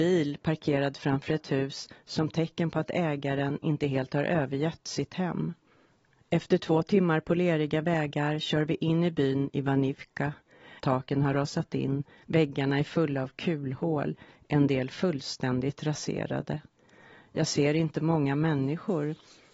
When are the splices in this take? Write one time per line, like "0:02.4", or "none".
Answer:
0:10.8